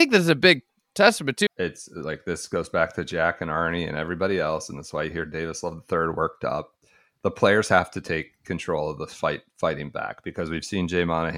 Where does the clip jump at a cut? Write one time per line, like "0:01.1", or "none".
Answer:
0:01.5